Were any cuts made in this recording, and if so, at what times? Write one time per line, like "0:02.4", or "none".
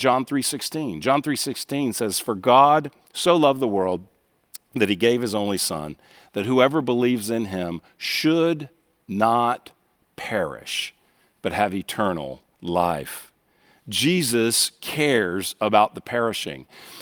0:12.5